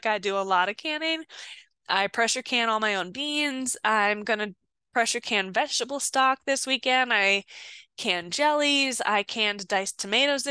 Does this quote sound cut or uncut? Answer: uncut